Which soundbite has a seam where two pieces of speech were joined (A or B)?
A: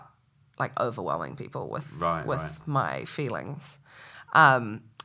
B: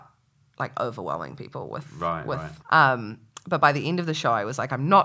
B